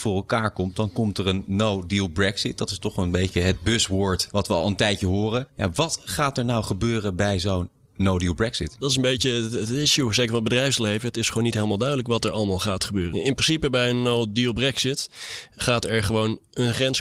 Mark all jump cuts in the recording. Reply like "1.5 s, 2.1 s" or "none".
none